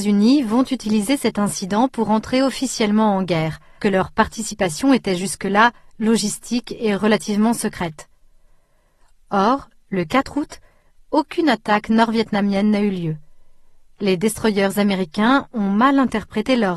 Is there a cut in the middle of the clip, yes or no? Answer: yes